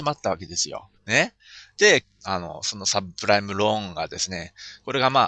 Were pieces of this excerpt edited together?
yes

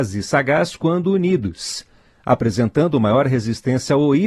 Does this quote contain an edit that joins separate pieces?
no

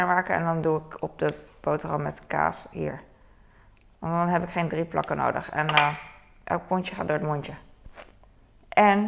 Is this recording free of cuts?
yes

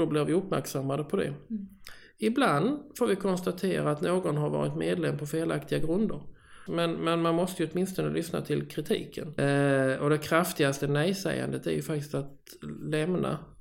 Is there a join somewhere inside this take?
yes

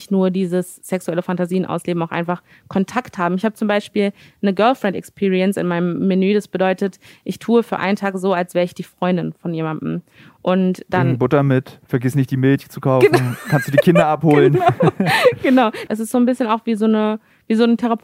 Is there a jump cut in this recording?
yes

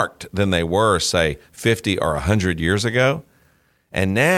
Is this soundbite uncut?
yes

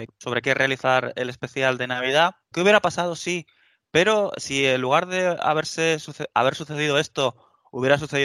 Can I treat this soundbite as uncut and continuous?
no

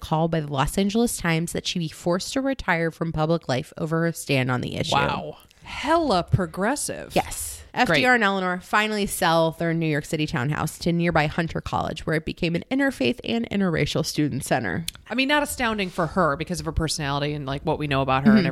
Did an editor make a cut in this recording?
yes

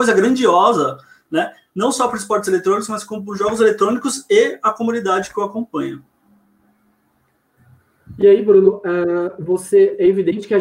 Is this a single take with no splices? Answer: yes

